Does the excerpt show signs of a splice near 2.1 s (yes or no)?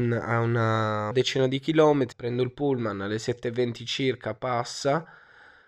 yes